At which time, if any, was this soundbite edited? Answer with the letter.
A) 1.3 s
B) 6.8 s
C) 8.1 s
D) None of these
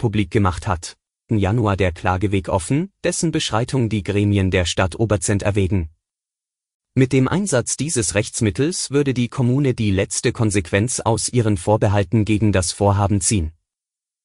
A